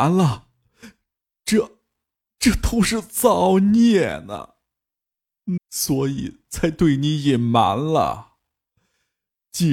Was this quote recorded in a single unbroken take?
no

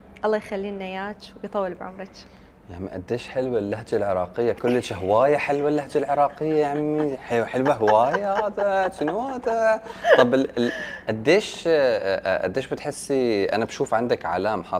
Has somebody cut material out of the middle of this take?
no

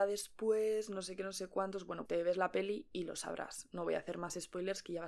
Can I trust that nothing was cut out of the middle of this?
no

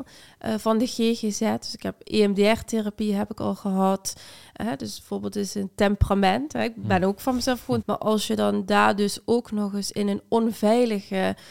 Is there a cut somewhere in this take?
yes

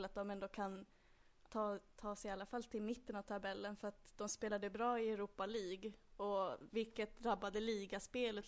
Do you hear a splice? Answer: yes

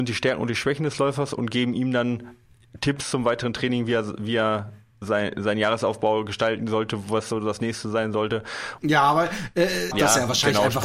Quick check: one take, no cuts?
no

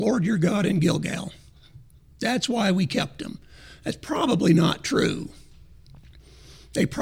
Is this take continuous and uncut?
yes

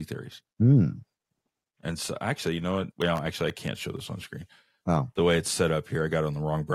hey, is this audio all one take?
no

